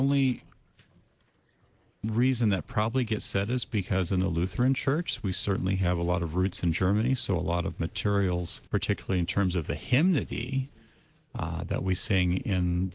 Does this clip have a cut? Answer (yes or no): yes